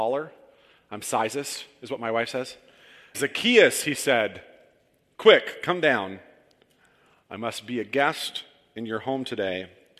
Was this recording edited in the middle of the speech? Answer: yes; 1 cut; at 3.1 s

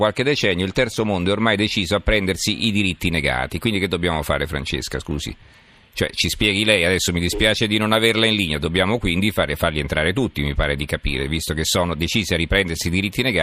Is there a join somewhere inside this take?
no; 0 cuts

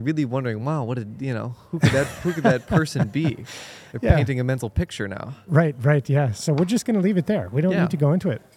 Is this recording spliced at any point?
no; 0 cuts

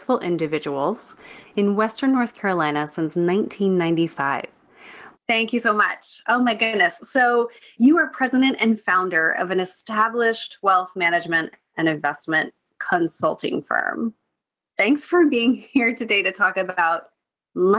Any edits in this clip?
yes; 2 cuts; at 1.4 s, 5.1 s

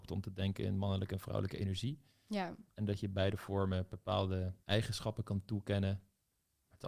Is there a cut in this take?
yes; 2 cuts; at 2.7 s, 4.6 s

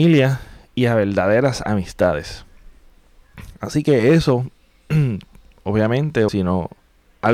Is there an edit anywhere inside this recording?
yes; 1 cut; at 6.3 s

